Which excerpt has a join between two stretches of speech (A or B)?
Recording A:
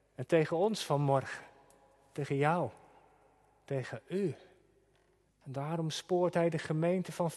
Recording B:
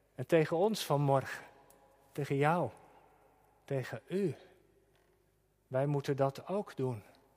A